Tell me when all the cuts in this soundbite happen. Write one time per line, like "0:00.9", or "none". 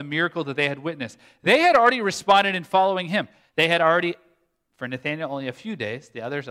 0:03.4